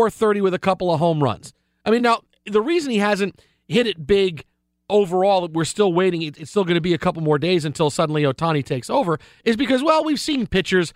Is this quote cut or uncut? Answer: uncut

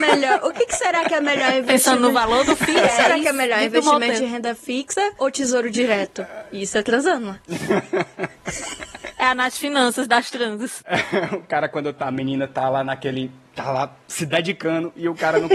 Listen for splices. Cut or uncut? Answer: uncut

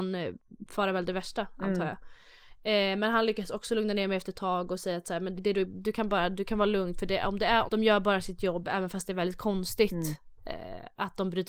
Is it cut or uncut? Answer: cut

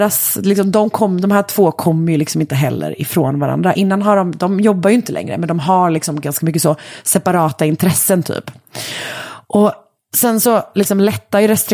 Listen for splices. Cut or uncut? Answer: uncut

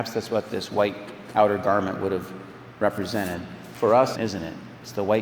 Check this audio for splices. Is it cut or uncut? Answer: cut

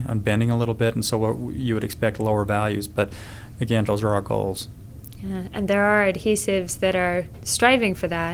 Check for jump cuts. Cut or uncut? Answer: cut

